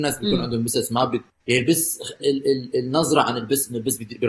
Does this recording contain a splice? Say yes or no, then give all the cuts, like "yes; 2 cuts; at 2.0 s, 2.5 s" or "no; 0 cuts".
yes; 1 cut; at 2.2 s